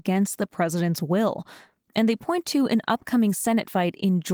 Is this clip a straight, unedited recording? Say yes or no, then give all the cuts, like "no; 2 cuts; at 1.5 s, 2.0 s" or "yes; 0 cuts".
yes; 0 cuts